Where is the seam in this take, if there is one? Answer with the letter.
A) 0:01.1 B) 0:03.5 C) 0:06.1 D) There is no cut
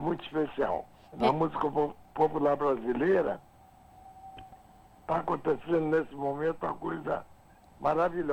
A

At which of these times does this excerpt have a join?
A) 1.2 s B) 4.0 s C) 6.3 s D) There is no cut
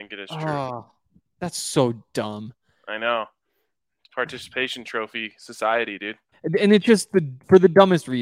C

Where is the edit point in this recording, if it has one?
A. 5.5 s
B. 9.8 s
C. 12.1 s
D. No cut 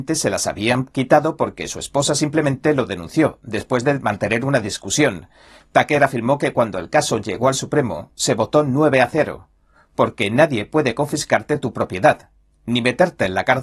D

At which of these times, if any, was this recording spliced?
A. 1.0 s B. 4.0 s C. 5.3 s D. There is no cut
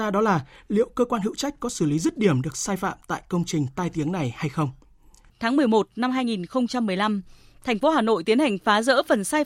C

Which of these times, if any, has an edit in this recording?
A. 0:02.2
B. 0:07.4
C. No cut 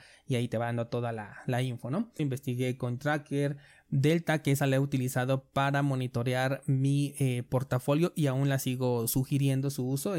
A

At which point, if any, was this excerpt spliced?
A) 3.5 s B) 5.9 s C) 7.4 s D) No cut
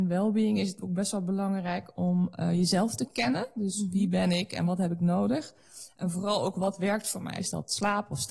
C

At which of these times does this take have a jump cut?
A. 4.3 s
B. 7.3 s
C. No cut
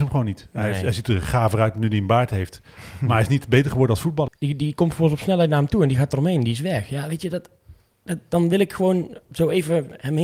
A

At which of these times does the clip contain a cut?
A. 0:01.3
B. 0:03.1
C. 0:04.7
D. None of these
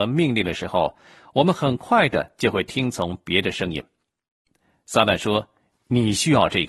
D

